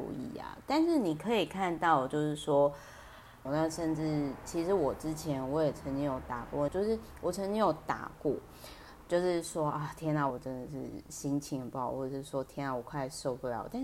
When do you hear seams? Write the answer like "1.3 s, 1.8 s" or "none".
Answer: 3.5 s, 6.7 s, 10.3 s